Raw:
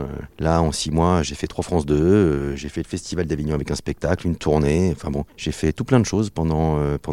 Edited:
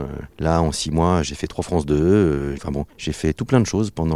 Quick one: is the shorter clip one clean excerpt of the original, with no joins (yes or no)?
no